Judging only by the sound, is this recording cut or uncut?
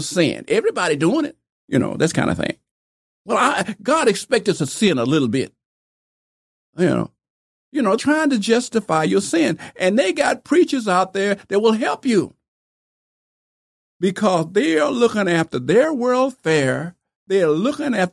cut